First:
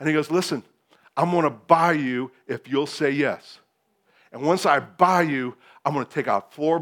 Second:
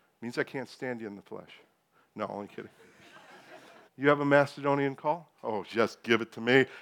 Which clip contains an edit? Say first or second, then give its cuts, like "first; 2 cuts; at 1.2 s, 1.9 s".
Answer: second; 2 cuts; at 3.9 s, 5.3 s